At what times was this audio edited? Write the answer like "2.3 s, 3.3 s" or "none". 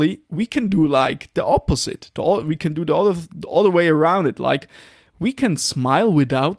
none